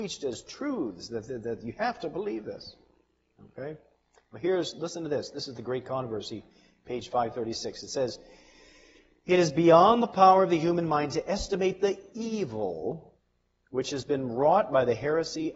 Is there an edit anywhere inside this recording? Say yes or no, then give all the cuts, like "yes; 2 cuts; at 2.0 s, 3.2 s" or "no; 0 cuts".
no; 0 cuts